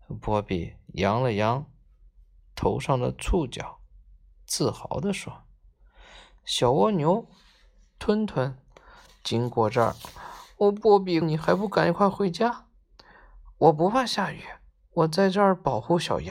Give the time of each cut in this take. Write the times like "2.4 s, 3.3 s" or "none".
11.2 s